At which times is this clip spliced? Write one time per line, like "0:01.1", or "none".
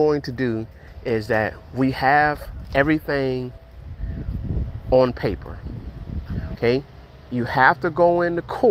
0:06.5

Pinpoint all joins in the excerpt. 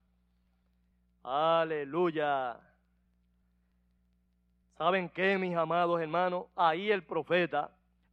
none

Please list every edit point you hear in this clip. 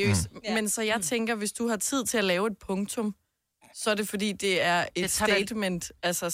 none

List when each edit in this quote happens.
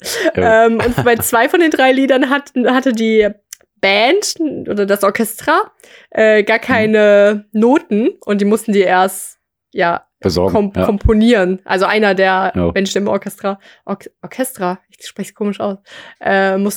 none

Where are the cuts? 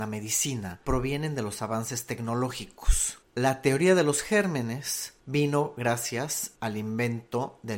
none

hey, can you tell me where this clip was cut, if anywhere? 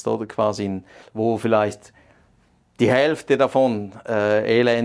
0:01.0

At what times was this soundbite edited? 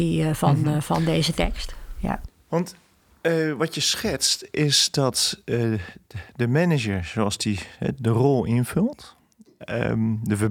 none

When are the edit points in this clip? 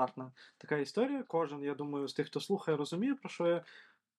0:01.2

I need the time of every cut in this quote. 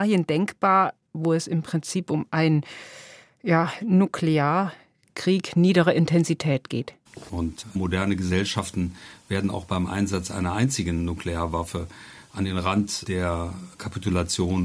0:07.3

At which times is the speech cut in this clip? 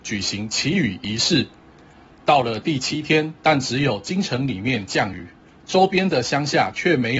0:03.4

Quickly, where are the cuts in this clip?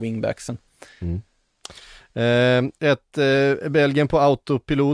none

